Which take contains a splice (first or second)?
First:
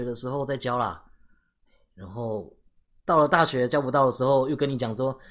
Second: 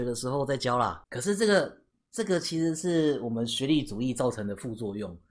second